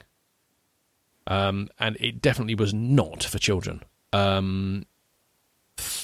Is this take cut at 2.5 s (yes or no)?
no